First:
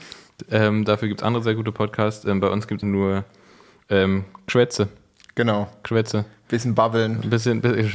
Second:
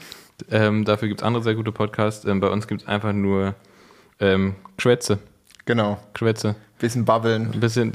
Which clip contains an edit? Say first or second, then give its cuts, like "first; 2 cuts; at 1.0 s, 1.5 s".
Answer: first; 1 cut; at 2.8 s